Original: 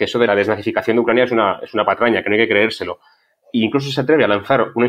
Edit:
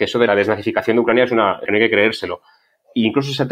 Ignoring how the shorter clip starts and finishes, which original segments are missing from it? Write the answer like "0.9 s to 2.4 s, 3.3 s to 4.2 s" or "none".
1.7 s to 2.2 s

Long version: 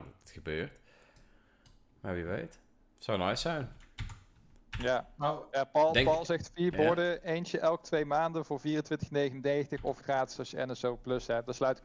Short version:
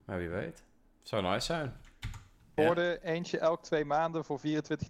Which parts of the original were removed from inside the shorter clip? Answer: 4.5 s to 6.8 s

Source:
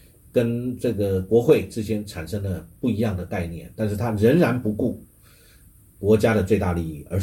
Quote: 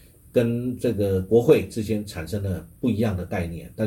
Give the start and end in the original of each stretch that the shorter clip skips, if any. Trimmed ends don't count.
none

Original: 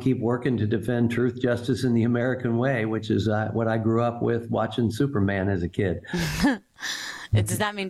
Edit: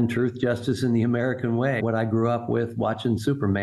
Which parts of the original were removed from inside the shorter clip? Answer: 2.8 s to 3.5 s

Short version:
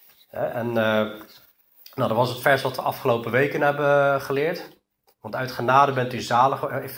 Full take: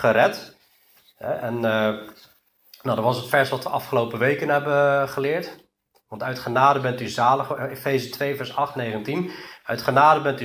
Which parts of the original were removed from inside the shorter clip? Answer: none

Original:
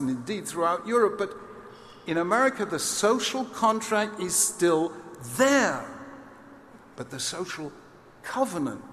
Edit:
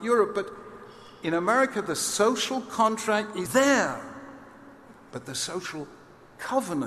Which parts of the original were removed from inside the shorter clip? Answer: 4.3 s to 5.3 s

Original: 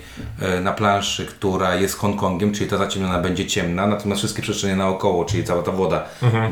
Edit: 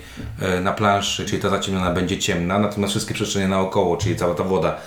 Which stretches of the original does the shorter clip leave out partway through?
1.3 s to 2.5 s

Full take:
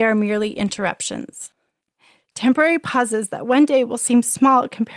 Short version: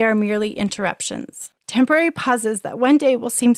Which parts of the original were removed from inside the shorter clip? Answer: 1.6 s to 2.2 s

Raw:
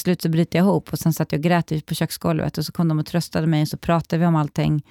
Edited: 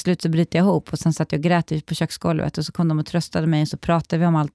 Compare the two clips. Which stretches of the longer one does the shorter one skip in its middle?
none

